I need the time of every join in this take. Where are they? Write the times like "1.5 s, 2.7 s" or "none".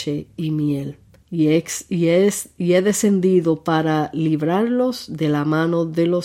1.2 s